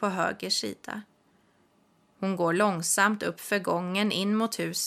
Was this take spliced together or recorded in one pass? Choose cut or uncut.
uncut